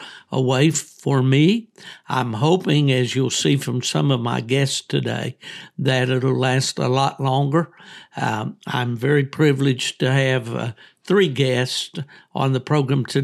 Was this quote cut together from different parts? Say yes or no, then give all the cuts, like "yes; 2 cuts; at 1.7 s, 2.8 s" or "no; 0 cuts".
no; 0 cuts